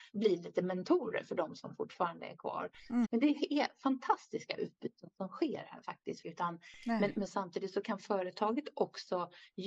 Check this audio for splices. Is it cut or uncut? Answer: cut